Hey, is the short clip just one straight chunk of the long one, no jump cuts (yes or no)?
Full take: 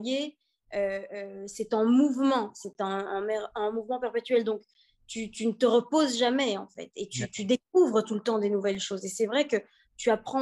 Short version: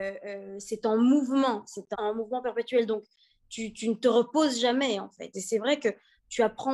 no